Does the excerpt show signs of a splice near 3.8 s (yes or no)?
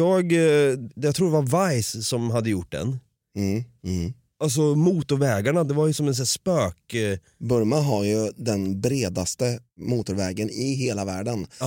yes